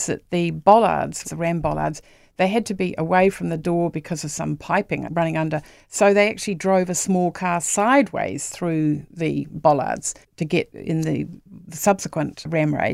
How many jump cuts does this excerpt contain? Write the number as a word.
two